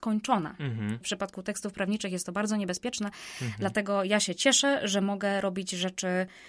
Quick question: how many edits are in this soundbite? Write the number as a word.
one